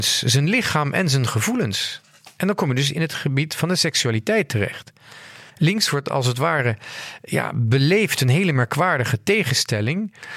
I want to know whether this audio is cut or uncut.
cut